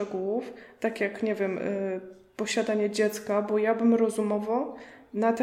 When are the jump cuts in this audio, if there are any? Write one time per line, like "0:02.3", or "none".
none

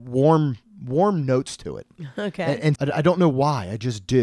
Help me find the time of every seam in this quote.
0:02.7

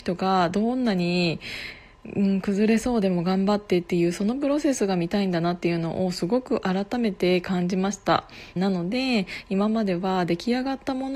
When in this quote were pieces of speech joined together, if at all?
0:08.6

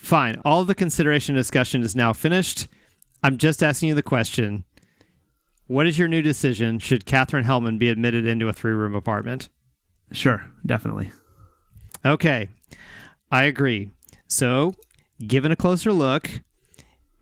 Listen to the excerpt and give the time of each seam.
none

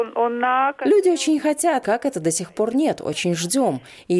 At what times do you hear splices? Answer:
0:01.8

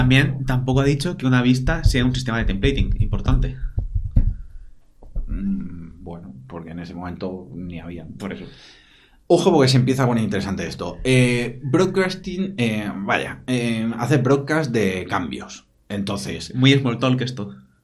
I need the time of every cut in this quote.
none

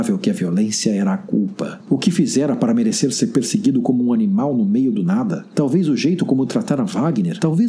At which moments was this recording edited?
0:01.8

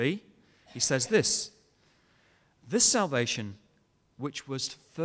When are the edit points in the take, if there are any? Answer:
none

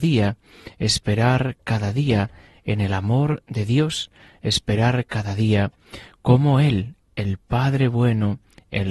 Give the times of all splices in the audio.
none

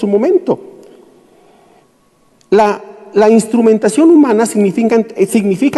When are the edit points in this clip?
none

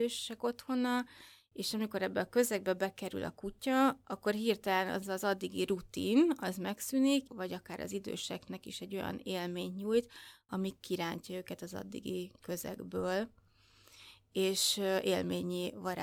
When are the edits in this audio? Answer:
0:07.3

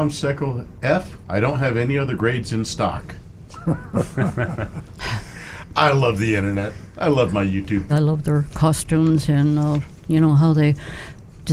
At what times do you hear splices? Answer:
0:07.9

